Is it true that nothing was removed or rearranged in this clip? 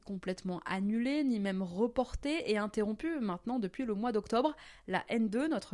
yes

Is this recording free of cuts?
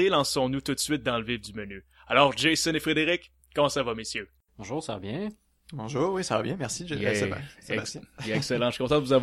yes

